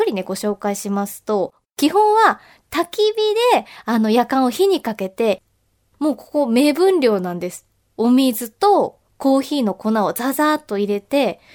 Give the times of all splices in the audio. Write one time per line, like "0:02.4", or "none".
none